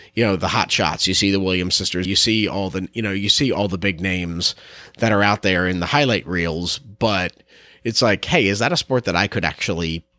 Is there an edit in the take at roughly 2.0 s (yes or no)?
yes